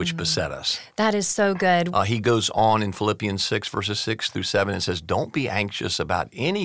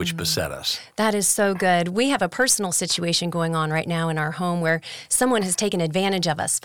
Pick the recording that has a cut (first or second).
first